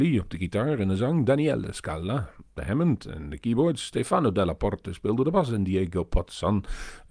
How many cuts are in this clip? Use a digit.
0